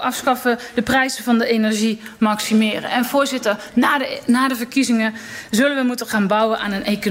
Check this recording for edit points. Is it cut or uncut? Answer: uncut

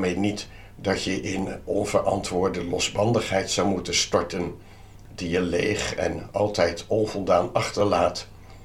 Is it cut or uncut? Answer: uncut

